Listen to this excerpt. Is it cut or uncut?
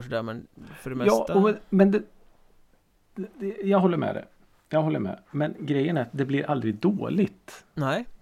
uncut